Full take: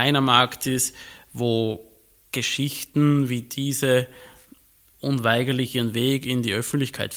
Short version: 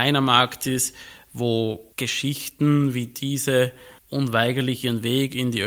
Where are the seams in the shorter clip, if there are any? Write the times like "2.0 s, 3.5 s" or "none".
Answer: 1.9 s, 4.0 s